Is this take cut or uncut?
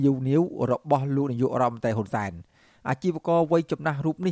uncut